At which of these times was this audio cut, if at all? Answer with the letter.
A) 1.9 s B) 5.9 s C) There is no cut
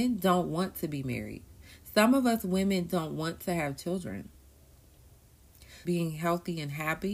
B